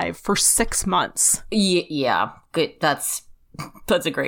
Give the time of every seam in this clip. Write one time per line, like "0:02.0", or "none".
none